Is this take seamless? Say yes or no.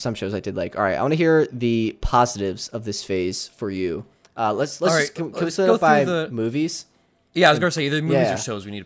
yes